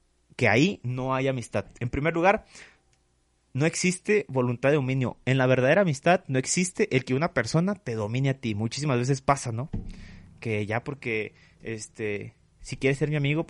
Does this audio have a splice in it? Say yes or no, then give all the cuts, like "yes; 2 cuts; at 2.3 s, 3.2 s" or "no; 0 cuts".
no; 0 cuts